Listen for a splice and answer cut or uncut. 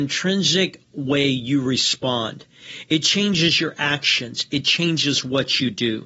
uncut